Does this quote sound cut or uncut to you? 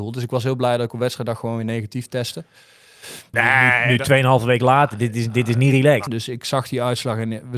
cut